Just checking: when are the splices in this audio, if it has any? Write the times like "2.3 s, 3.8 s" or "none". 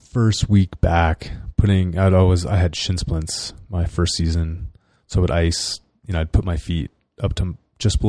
none